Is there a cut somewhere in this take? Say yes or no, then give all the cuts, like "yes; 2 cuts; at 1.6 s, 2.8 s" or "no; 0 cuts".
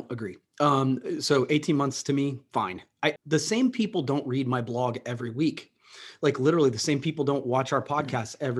yes; 1 cut; at 3.2 s